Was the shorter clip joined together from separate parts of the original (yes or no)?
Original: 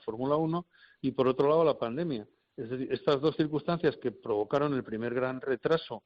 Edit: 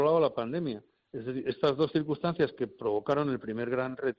no